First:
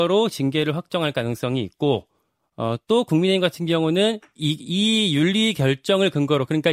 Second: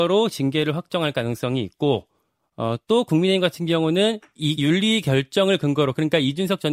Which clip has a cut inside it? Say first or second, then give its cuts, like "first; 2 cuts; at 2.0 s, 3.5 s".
second; 1 cut; at 4.6 s